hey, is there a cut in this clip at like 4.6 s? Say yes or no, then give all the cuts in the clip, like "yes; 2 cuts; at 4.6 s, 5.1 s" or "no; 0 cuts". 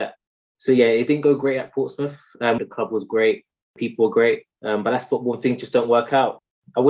no; 1 cut; at 2.6 s